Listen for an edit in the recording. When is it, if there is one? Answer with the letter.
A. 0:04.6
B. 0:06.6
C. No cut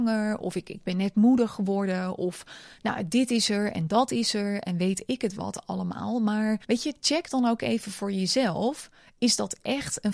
B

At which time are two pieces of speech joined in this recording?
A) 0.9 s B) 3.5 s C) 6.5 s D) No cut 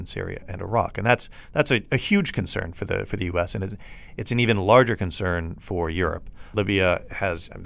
D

